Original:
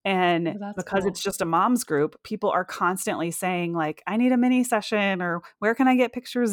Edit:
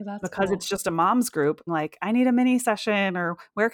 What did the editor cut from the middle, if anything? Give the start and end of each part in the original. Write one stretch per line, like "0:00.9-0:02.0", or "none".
0:02.2-0:03.7